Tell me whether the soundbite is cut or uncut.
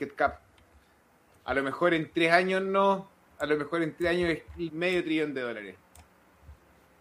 cut